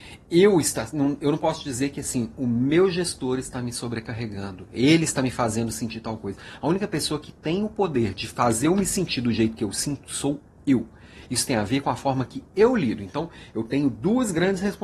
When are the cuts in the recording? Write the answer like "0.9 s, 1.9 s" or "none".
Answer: none